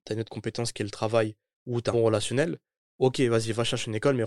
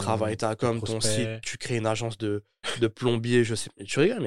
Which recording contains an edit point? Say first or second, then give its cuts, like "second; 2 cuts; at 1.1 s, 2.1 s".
first; 1 cut; at 1.9 s